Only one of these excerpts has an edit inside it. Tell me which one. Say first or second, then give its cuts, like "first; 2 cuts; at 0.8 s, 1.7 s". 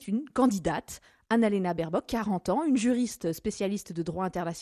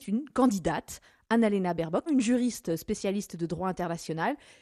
second; 1 cut; at 2.1 s